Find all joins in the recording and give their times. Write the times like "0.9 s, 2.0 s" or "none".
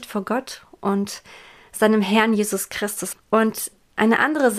3.1 s